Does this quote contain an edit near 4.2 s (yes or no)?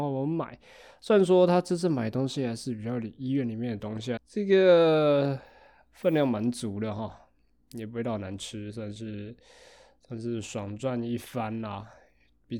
yes